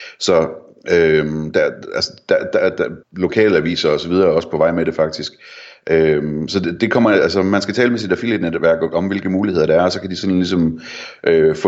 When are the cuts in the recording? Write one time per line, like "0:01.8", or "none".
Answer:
0:03.0